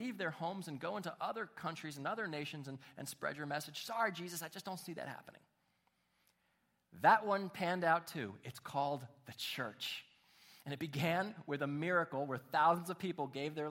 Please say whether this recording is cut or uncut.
uncut